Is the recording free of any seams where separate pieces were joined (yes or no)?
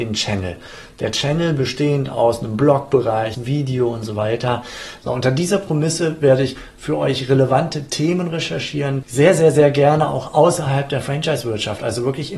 no